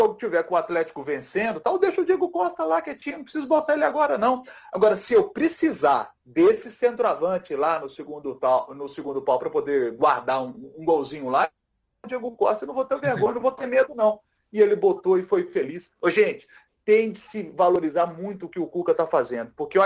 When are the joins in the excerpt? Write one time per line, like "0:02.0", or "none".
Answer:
none